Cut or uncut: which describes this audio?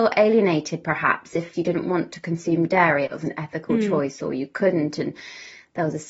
cut